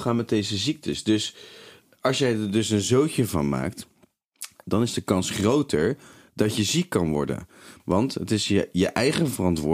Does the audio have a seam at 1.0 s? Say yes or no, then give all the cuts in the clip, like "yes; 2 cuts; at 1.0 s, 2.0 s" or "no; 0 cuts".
no; 1 cut; at 7.8 s